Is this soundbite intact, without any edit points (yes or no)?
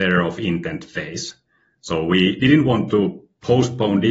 yes